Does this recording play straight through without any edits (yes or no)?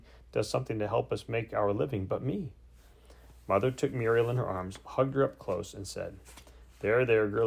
yes